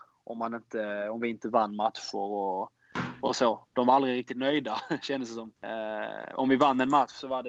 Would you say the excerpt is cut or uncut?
cut